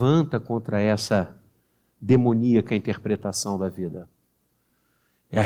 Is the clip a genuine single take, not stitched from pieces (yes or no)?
yes